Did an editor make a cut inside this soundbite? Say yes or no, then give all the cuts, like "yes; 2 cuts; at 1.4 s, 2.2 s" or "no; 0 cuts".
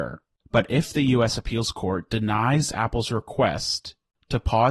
no; 0 cuts